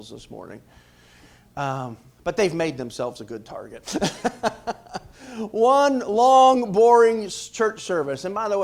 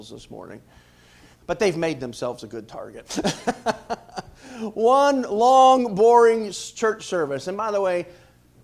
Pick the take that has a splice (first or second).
second